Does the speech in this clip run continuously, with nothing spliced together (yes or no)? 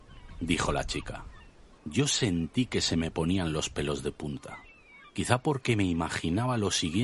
no